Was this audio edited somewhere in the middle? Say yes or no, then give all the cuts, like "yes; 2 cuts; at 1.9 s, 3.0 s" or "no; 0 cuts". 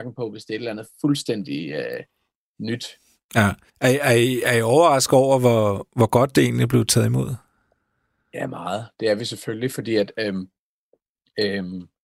yes; 1 cut; at 3.7 s